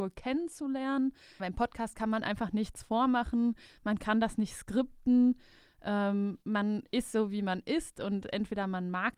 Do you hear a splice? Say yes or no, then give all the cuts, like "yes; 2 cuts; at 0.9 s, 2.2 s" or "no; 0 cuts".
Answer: yes; 1 cut; at 1.4 s